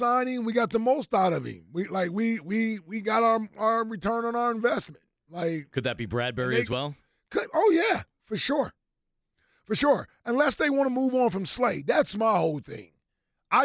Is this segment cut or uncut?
uncut